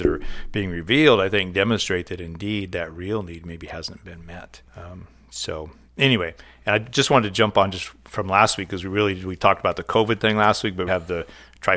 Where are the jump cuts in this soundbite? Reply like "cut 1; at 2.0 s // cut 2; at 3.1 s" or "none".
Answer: cut 1; at 4.7 s // cut 2; at 10.9 s